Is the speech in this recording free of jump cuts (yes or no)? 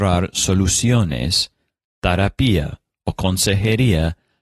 yes